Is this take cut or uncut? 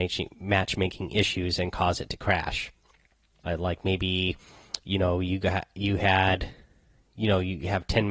cut